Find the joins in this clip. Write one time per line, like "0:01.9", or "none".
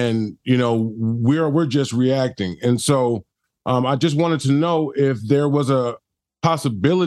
none